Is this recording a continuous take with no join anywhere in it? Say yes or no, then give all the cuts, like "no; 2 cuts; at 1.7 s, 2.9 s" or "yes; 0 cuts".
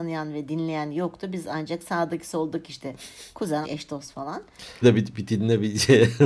no; 2 cuts; at 3.6 s, 4.8 s